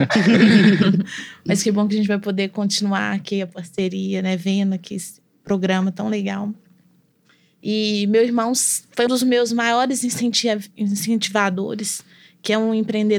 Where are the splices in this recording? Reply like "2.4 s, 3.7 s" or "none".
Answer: 7.6 s, 9.1 s